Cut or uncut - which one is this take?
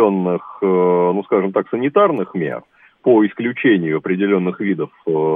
uncut